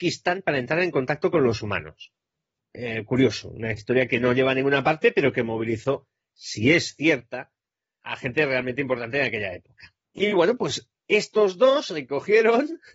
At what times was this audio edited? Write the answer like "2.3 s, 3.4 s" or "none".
2.6 s, 10.1 s